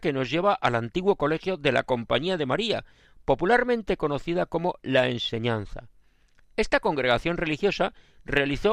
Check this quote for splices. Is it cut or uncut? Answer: uncut